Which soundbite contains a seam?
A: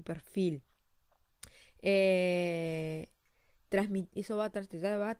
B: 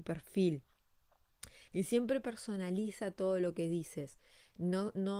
B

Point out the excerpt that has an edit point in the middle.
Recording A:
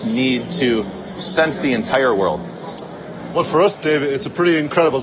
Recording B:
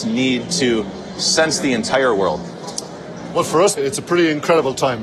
B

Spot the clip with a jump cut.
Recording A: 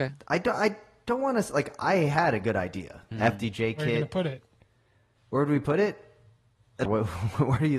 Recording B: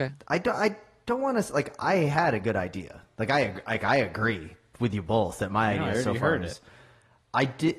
A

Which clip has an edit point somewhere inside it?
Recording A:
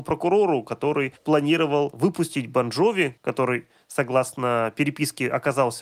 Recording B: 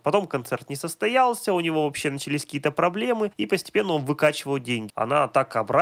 B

